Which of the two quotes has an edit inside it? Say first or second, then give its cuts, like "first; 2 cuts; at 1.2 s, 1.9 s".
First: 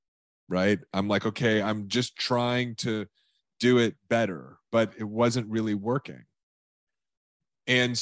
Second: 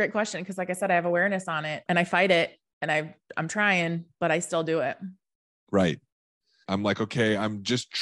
second; 1 cut; at 6.6 s